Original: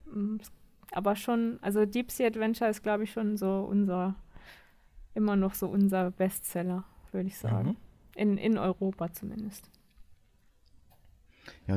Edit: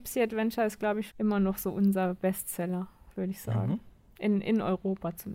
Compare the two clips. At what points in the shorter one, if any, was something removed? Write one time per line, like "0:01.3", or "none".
0:01.1